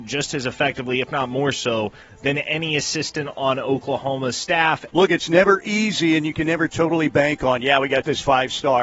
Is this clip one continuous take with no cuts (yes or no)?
no